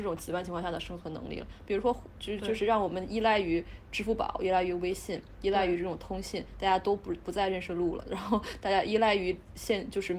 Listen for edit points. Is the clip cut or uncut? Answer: uncut